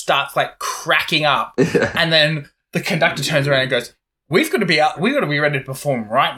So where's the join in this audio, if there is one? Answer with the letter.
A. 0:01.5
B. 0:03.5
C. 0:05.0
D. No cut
C